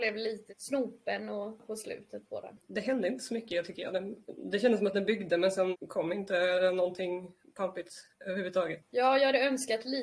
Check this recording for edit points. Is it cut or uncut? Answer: uncut